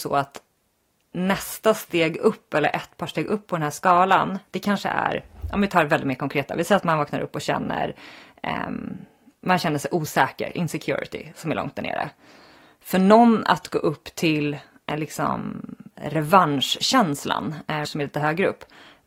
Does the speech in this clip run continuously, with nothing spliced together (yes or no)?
no